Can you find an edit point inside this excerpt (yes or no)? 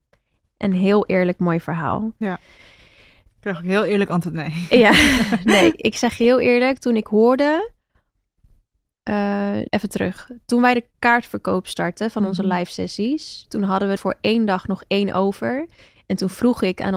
yes